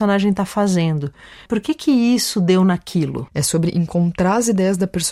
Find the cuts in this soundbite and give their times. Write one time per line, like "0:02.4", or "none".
0:01.5
0:03.3